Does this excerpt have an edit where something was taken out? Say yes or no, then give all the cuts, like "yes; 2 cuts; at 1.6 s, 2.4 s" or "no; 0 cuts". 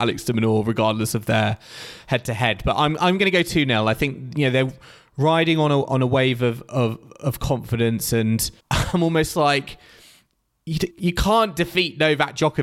yes; 2 cuts; at 8.6 s, 10.9 s